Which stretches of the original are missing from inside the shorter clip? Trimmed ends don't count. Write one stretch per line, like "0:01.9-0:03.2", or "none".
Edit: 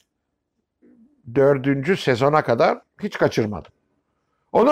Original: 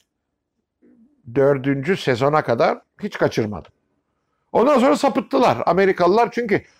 none